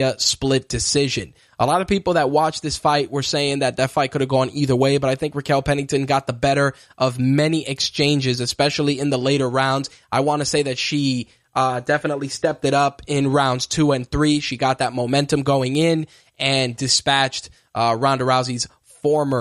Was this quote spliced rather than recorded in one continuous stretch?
no; 0 cuts

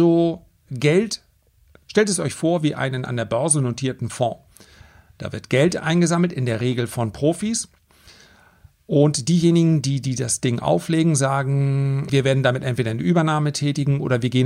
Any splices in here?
yes; 1 cut; at 12.1 s

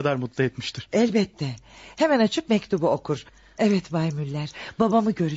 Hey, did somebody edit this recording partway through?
yes; 1 cut; at 3.6 s

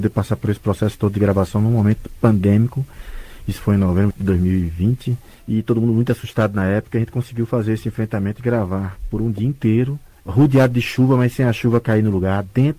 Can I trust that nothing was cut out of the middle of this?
yes; 0 cuts

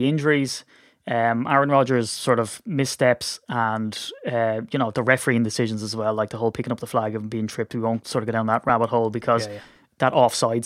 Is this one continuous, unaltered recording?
yes; 0 cuts

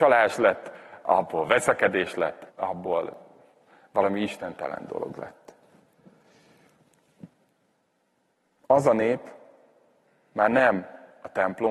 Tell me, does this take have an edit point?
yes; 1 cut; at 2.5 s

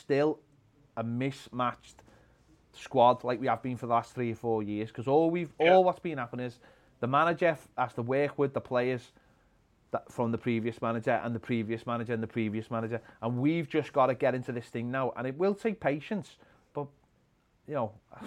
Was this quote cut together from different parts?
no; 0 cuts

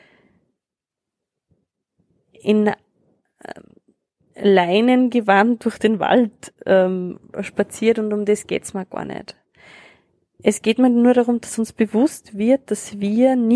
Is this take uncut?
yes; 0 cuts

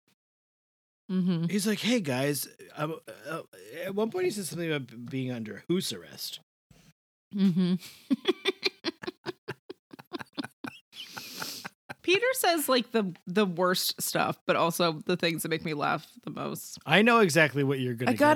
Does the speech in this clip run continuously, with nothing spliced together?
yes; 0 cuts

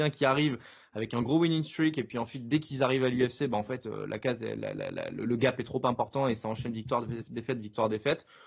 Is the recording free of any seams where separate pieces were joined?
yes; 0 cuts

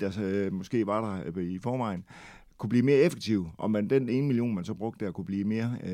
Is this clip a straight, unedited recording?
yes; 0 cuts

